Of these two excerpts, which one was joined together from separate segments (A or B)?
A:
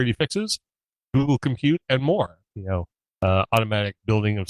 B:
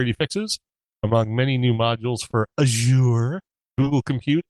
A